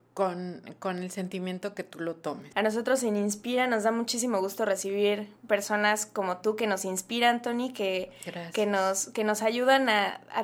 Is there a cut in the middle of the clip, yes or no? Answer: yes